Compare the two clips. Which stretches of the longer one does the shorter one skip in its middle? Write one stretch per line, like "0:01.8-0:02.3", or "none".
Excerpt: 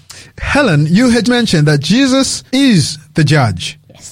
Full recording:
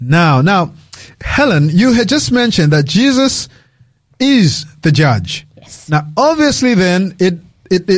0:02.1-0:02.3
0:03.5-0:04.2